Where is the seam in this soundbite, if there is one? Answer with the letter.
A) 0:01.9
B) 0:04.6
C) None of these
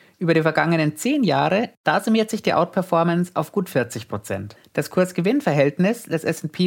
B